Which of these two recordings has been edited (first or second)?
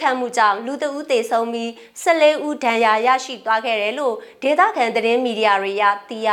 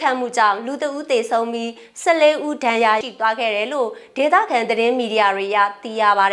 second